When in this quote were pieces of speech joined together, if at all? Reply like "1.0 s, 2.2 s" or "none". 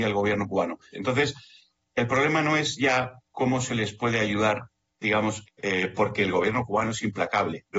0.9 s, 5.4 s